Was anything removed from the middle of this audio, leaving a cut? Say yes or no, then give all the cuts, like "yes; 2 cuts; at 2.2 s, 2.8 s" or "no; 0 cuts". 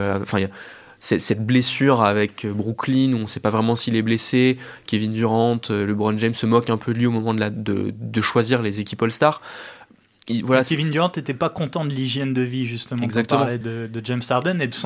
yes; 1 cut; at 13.6 s